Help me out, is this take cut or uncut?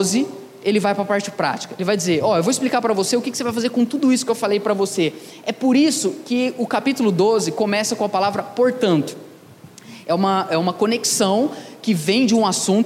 uncut